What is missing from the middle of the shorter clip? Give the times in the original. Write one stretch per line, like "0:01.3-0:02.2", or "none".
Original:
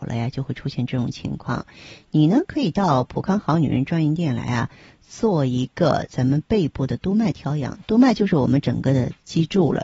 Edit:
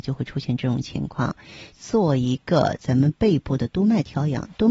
0:02.0-0:05.0